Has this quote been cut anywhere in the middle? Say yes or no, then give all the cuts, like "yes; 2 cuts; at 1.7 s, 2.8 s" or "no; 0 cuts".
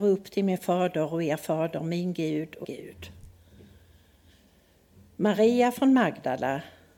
yes; 1 cut; at 2.6 s